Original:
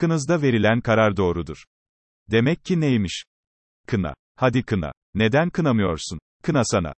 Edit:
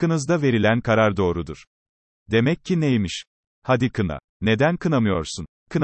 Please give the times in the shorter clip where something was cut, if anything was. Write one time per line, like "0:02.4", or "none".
0:03.5